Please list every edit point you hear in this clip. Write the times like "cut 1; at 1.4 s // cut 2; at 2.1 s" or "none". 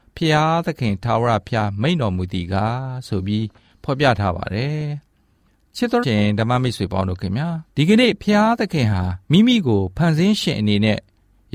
cut 1; at 6.0 s // cut 2; at 7.7 s // cut 3; at 9.2 s